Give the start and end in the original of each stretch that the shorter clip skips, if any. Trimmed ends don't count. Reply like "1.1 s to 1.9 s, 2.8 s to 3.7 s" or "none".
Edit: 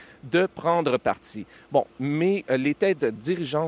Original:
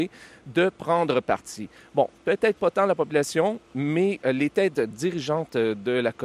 2.1 s to 3.6 s